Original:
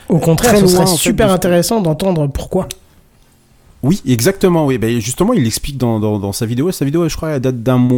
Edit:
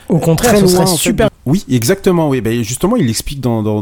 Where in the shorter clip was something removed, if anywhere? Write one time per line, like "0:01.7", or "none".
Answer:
0:01.3